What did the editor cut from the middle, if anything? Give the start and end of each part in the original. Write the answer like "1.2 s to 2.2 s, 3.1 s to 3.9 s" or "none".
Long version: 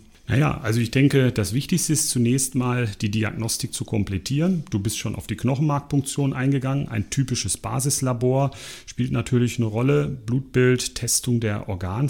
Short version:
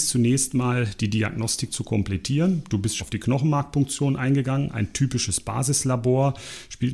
5.0 s to 5.2 s

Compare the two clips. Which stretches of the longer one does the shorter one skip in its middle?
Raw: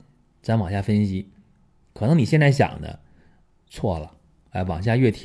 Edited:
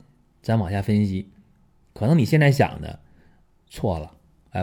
none

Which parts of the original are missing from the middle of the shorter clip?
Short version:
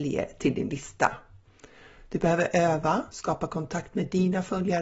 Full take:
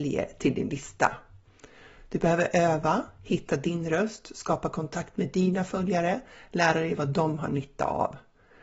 3.1 s to 4.3 s

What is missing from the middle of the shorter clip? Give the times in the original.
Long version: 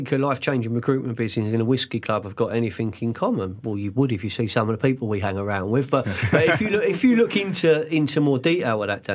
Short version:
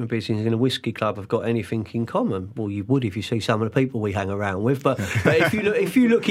none

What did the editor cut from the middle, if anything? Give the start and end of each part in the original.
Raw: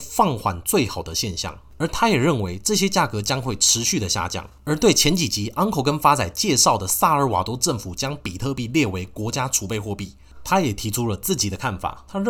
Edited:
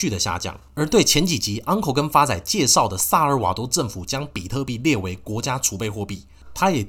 none

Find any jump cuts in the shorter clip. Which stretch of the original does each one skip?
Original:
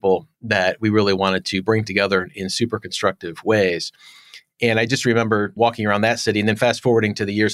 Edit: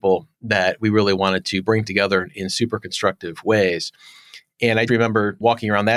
4.9 s to 5.0 s

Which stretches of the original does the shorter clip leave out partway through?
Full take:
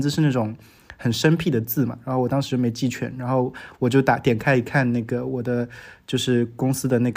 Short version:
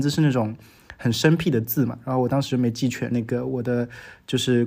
3.1 s to 4.9 s

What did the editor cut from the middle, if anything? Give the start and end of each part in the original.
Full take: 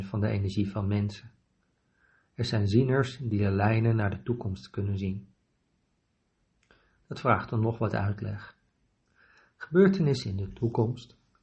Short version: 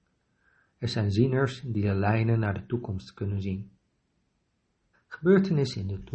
6.5 s to 9.4 s

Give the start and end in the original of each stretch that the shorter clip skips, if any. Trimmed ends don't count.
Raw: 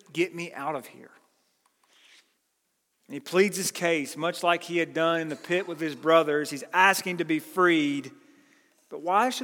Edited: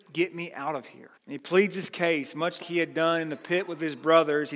1.1 s to 3.0 s, 4.4 s to 4.6 s

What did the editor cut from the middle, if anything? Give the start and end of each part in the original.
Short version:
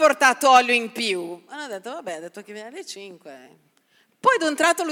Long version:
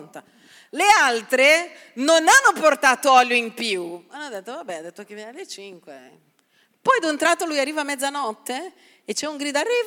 none

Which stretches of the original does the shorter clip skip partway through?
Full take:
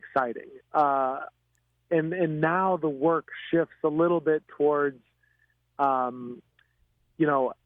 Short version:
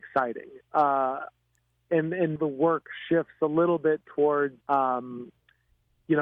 2.4 s to 2.8 s, 5.0 s to 5.7 s

